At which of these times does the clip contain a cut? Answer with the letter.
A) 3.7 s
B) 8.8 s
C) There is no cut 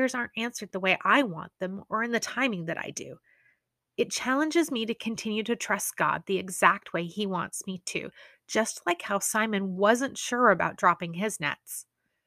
C